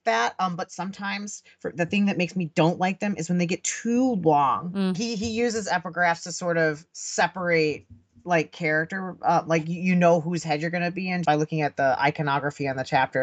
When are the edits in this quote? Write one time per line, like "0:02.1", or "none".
0:04.9
0:11.2